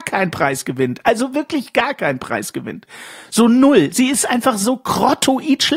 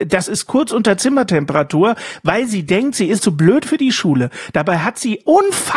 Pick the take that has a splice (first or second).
second